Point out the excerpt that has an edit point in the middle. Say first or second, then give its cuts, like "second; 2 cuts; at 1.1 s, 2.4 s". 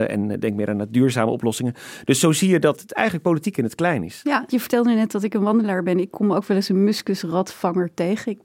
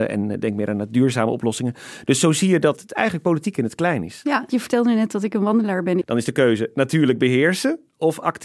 second; 1 cut; at 6.0 s